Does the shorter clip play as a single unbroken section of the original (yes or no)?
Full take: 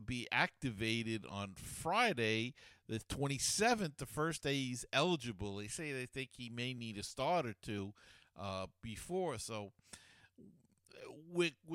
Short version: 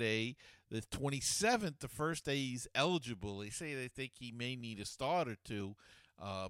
yes